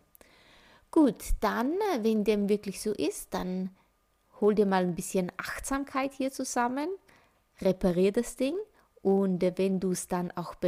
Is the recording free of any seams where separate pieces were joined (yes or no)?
yes